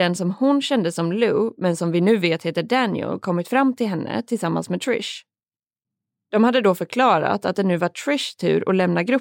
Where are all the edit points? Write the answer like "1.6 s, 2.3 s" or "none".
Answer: none

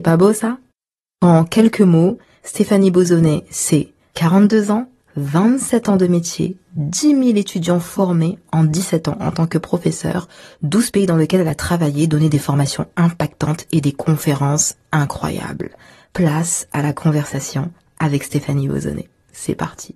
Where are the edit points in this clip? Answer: none

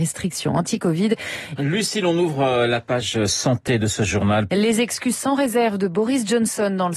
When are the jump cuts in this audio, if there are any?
1.6 s, 4.5 s

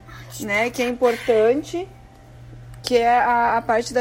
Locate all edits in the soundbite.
none

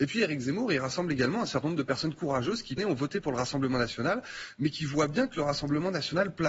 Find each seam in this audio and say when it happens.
2.8 s

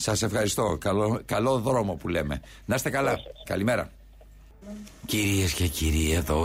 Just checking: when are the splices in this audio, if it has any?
none

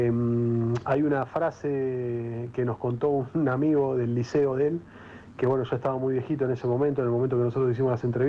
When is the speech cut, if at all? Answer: none

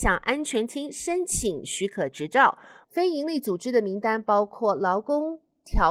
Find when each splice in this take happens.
2.8 s

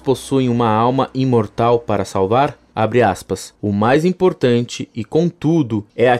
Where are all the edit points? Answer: 3.6 s

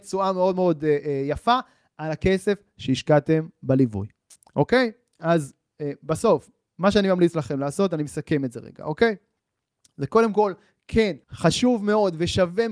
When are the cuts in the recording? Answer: 11.2 s

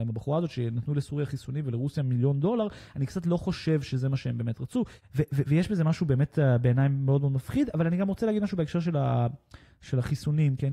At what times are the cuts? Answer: none

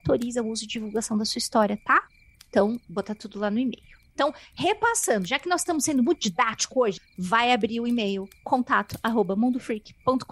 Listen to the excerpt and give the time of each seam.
7.0 s

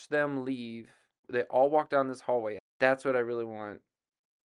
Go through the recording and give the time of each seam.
1.2 s, 2.6 s

